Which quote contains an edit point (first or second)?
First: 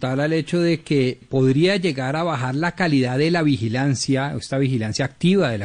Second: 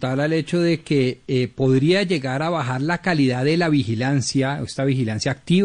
first